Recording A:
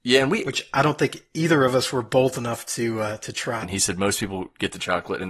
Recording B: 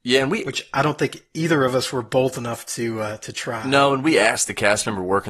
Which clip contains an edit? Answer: A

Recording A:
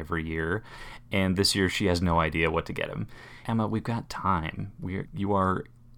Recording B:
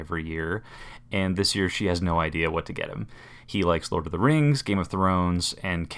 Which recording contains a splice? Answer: A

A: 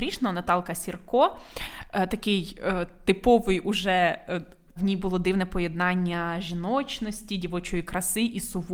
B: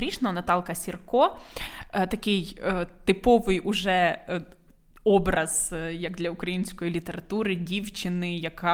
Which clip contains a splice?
A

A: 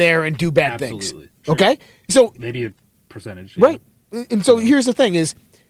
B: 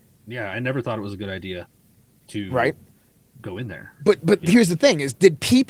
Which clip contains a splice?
A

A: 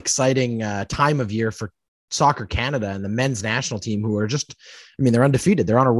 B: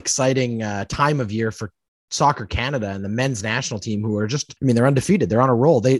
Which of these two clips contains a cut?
B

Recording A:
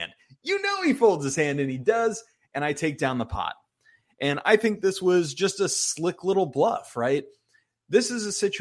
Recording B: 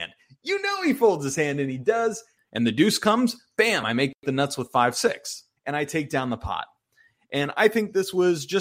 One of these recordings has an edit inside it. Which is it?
B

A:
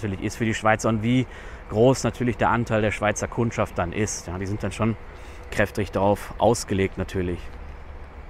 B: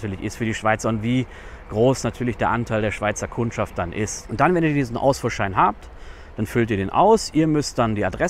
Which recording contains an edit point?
B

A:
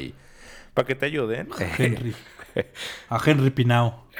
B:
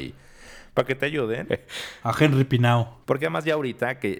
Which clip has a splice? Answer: B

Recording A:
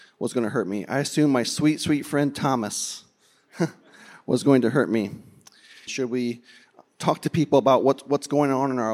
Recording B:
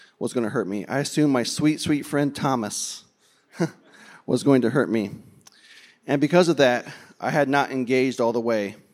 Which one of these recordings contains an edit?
A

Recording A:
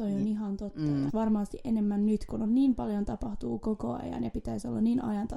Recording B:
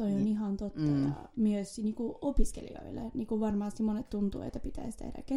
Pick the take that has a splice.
A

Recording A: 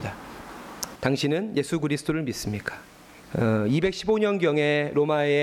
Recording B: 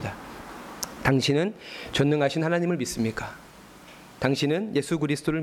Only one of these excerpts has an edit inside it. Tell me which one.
A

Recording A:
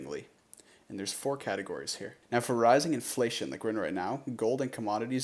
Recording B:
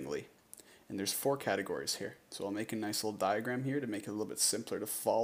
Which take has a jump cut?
A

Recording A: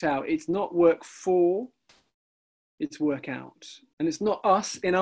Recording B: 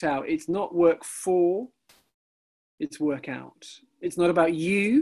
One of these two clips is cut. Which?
A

